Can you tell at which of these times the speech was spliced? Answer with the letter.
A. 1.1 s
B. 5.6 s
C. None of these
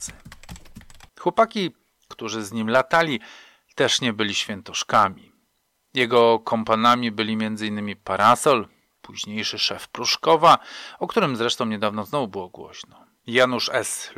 A